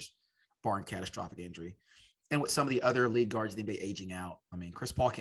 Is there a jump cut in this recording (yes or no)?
no